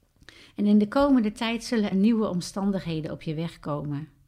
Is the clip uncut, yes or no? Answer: no